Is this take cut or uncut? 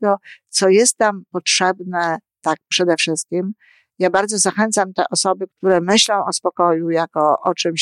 cut